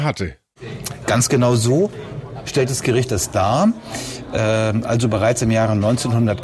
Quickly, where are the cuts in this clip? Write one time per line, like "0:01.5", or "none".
none